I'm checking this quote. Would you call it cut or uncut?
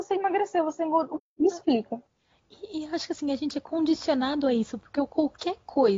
cut